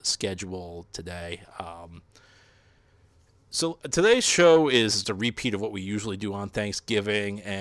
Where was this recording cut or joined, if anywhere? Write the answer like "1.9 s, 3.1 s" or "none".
5.0 s